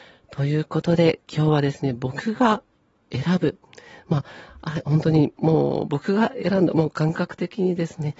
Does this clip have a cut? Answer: no; 0 cuts

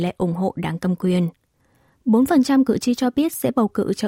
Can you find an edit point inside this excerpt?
no; 0 cuts

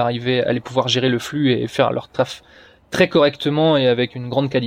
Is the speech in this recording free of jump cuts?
yes; 0 cuts

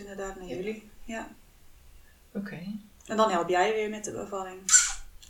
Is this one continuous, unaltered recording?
yes; 0 cuts

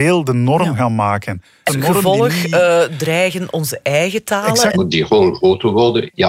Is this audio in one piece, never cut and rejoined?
no; 2 cuts; at 1.7 s, 4.7 s

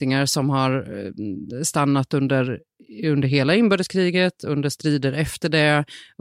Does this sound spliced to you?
no; 0 cuts

